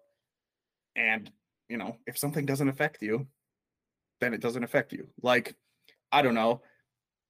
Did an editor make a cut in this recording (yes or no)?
no